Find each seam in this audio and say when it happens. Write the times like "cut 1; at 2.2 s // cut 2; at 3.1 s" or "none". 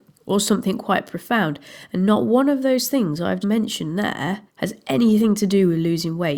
cut 1; at 3.4 s // cut 2; at 4.5 s